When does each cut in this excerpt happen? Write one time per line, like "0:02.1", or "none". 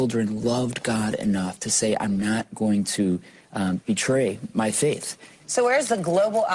0:05.4